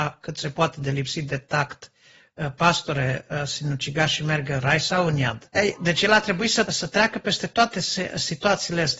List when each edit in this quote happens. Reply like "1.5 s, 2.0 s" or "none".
5.5 s, 6.7 s

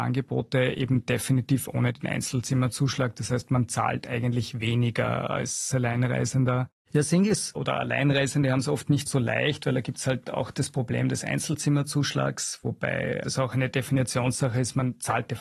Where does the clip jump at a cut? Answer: 6.8 s

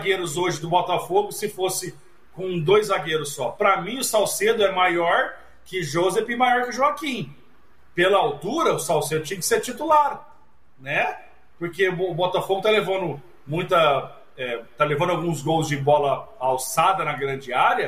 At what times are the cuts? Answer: none

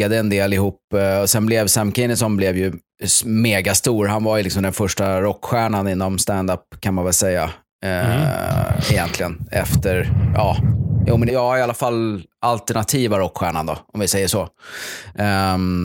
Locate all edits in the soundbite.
11.3 s

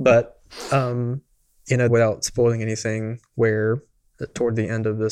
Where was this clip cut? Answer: 1.9 s

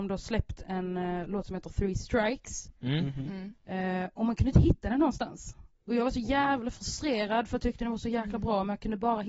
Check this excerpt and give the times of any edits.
none

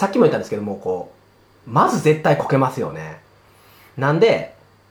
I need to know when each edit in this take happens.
1.6 s

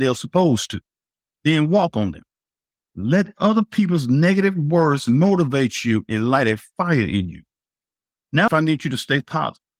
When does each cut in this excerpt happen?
8.5 s

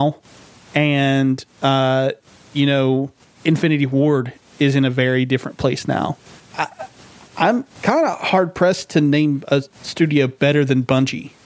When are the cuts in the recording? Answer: 3.2 s, 6.4 s

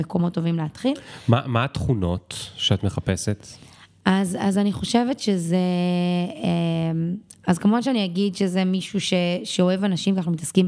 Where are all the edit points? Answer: none

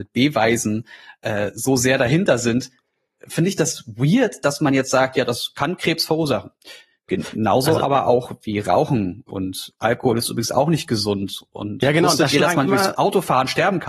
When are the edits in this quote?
none

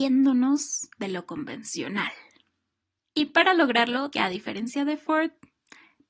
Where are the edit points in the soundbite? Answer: 3.0 s, 4.1 s

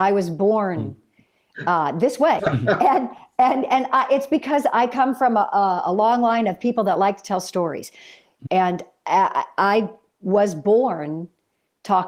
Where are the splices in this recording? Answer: 2.4 s, 8.5 s

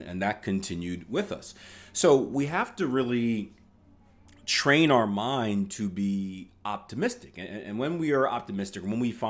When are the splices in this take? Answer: none

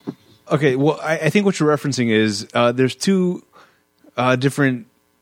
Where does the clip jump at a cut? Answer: none

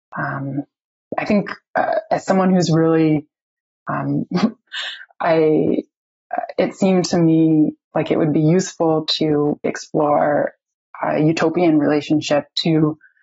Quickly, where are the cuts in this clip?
4.7 s, 9.6 s

